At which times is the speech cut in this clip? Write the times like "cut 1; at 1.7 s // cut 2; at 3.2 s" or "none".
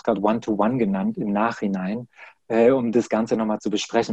none